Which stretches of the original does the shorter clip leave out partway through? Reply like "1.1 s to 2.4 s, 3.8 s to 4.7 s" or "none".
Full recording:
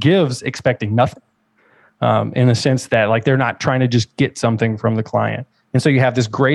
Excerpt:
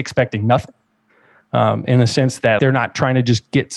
3.1 s to 3.2 s